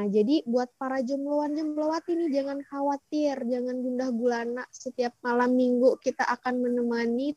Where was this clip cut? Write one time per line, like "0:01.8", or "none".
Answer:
none